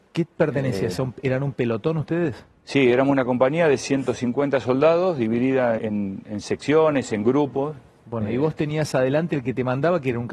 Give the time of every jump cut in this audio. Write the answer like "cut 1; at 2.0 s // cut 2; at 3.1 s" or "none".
cut 1; at 5.8 s

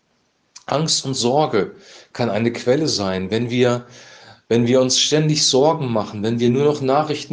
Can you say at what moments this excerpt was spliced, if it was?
none

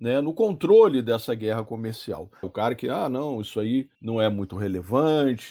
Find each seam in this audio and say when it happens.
cut 1; at 2.4 s // cut 2; at 3.9 s

